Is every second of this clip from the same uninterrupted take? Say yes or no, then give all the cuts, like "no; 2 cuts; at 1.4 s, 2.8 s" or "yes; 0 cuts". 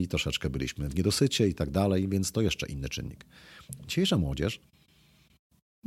yes; 0 cuts